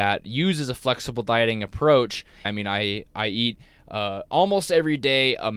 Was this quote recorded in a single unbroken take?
no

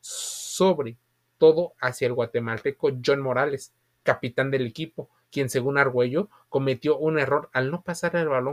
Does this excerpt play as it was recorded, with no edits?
yes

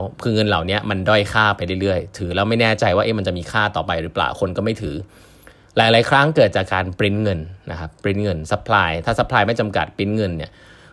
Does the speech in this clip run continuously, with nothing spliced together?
yes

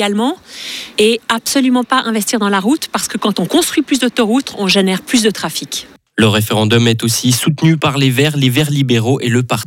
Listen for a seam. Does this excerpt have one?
no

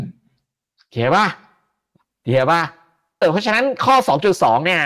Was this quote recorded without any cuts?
no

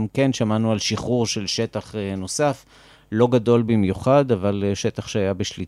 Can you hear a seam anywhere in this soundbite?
no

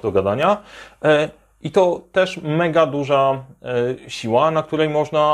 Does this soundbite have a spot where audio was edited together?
no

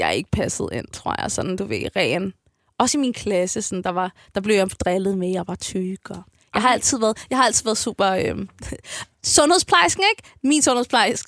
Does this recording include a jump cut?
no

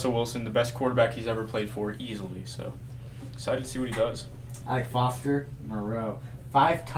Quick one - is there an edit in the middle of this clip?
yes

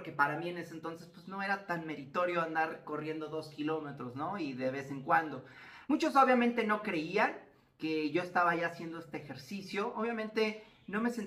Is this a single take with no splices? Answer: no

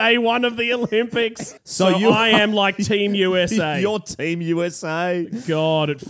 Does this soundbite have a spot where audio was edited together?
yes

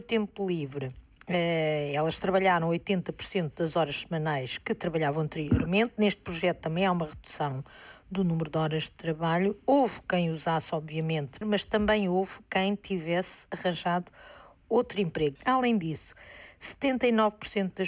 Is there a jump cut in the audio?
yes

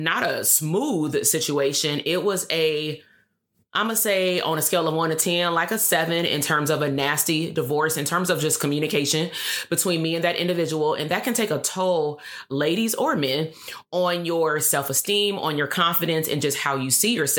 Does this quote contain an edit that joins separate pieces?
no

